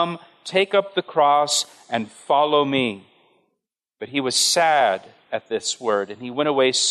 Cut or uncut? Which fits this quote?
uncut